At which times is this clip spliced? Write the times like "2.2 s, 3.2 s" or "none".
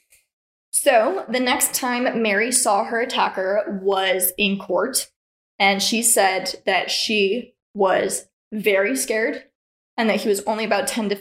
none